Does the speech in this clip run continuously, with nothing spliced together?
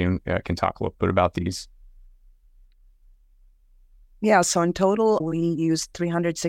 no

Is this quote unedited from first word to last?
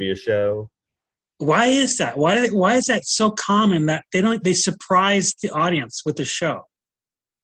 yes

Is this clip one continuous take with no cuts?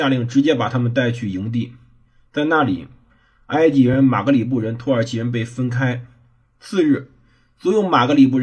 yes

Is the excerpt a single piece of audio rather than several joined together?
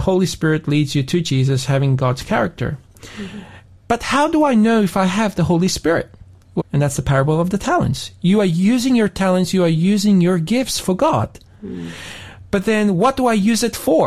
no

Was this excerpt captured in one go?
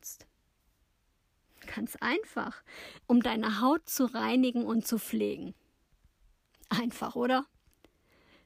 no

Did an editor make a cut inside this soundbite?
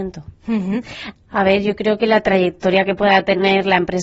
yes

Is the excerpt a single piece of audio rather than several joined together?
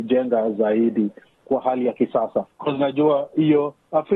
no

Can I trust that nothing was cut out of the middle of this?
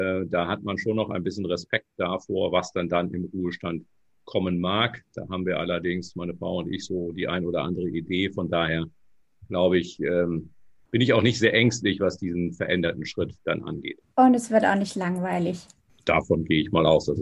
yes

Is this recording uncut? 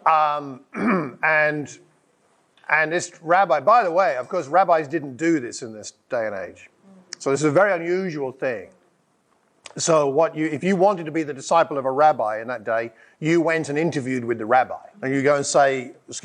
no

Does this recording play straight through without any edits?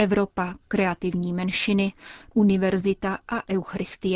no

